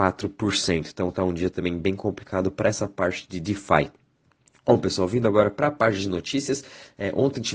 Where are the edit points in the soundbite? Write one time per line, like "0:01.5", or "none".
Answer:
none

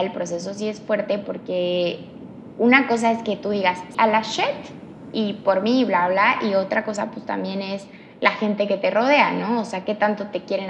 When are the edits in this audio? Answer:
0:03.9

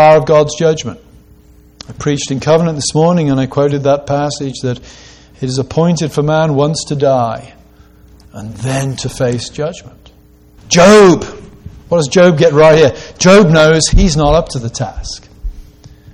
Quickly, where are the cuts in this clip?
0:10.6

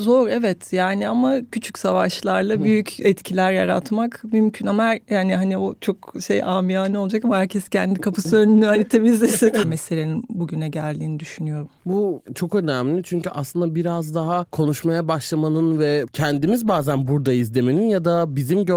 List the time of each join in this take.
0:01.5
0:09.6

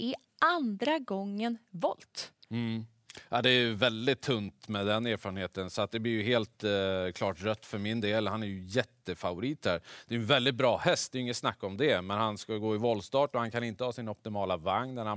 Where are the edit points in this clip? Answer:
none

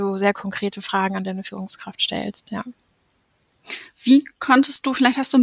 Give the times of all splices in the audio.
0:03.9

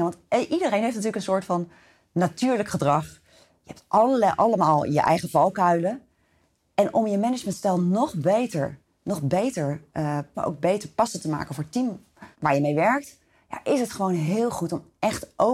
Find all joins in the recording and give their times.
0:10.3
0:12.3

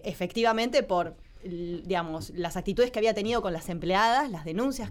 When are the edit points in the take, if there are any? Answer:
none

